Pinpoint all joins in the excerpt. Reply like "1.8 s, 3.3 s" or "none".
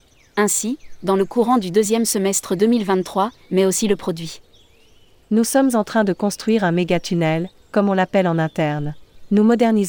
3.4 s